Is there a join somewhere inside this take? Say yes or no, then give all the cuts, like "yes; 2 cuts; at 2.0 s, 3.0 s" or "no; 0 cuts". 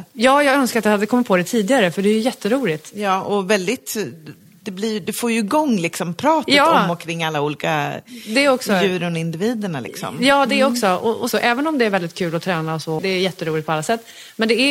yes; 2 cuts; at 11.3 s, 13.0 s